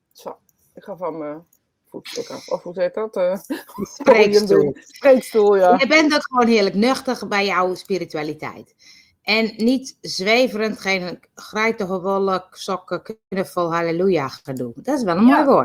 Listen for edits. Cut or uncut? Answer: uncut